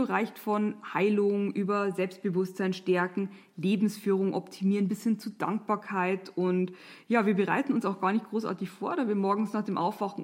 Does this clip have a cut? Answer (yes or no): no